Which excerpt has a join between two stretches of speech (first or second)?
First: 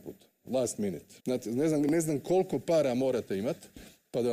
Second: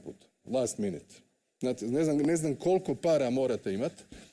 first